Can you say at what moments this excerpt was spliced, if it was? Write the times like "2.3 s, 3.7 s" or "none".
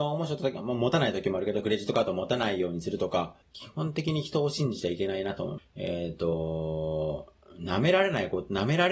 3.4 s, 5.6 s